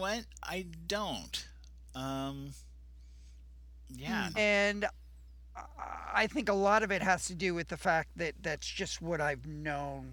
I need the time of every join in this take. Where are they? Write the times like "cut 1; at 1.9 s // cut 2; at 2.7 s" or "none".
cut 1; at 4.3 s